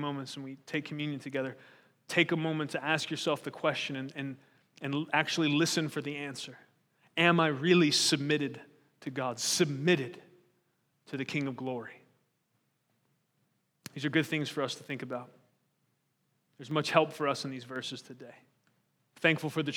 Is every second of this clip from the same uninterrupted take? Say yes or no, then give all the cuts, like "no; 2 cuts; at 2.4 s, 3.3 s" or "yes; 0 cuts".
yes; 0 cuts